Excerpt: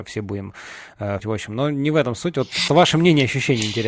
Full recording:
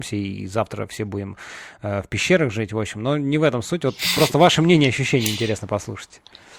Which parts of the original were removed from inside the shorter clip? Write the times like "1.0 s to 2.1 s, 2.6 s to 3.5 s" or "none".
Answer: 2.0 s to 2.7 s, 4.2 s to 4.3 s